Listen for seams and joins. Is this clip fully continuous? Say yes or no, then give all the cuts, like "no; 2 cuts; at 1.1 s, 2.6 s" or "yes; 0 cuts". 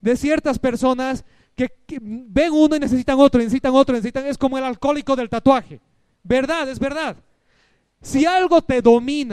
yes; 0 cuts